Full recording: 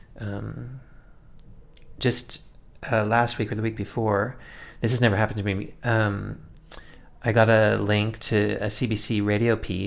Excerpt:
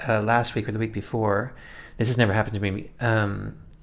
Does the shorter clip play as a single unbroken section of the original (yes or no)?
yes